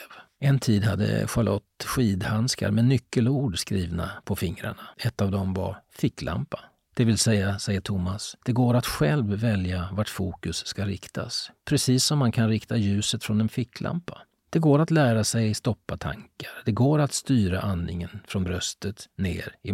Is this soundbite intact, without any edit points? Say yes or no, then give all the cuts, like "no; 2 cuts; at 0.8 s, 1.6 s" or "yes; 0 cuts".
no; 1 cut; at 4.9 s